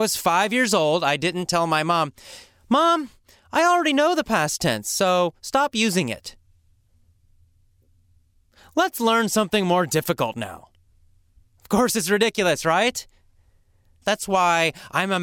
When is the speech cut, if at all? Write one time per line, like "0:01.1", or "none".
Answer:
0:11.5
0:14.0